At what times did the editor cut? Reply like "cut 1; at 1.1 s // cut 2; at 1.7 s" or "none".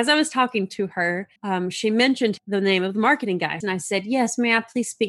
cut 1; at 1.4 s // cut 2; at 3.6 s